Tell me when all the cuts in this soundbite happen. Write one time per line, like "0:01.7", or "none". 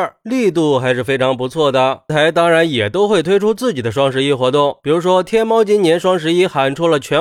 0:02.1